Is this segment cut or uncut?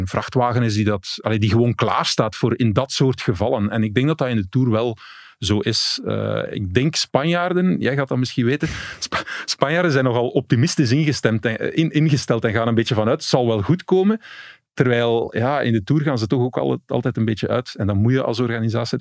uncut